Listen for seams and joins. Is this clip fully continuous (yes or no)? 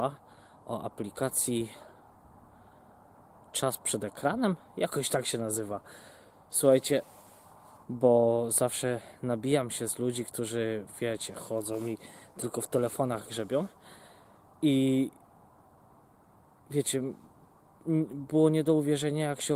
no